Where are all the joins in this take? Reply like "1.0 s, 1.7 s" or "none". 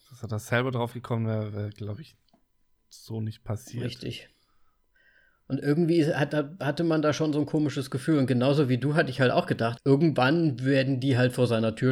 9.8 s